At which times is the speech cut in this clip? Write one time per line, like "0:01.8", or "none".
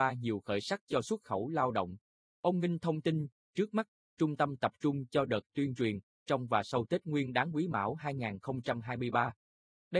0:02.2
0:03.4
0:06.2